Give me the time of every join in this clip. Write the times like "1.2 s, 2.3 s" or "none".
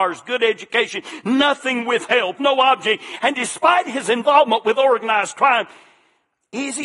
2.4 s

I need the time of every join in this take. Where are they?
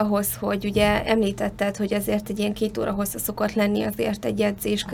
none

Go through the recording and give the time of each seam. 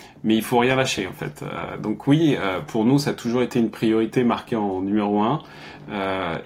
none

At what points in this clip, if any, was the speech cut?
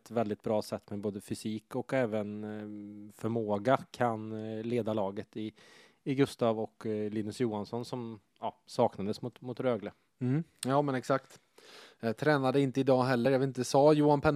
none

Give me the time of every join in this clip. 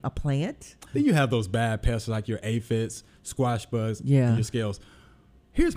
0.9 s

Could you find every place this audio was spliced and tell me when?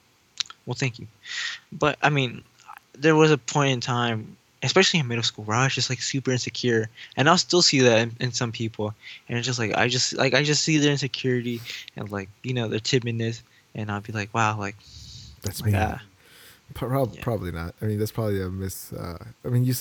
none

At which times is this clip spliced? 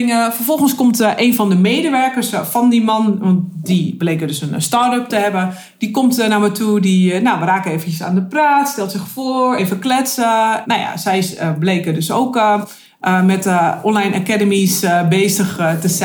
none

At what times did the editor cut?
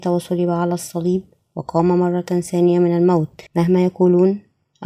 3.5 s

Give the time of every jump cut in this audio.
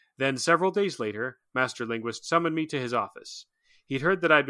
none

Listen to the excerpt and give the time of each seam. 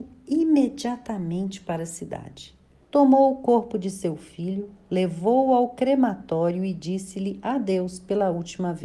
2.8 s

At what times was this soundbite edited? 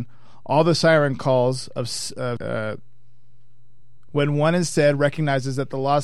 2.4 s, 4.1 s

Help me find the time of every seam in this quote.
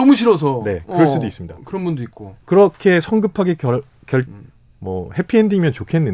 4.3 s

